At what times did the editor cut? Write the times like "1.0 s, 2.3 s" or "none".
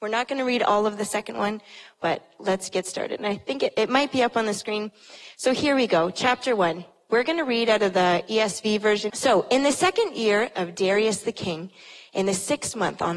9.1 s